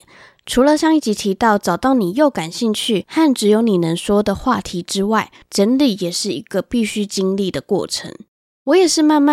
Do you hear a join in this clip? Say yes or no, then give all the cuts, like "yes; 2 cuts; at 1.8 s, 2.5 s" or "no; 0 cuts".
yes; 1 cut; at 5.4 s